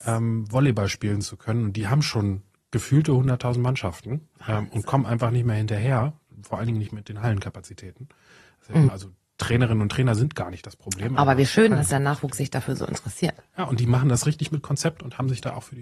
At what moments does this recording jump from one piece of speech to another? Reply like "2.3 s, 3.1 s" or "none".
8.9 s